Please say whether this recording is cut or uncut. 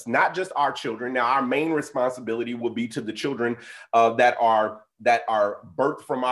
uncut